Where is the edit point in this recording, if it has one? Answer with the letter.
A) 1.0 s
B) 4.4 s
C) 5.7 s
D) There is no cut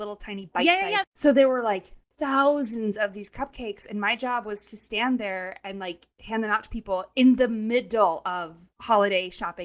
A